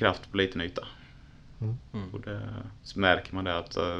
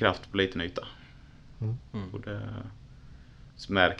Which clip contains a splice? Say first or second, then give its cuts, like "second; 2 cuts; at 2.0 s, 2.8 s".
first; 1 cut; at 2.8 s